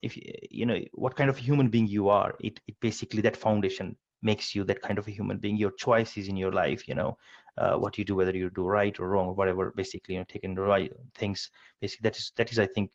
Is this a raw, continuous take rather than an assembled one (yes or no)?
yes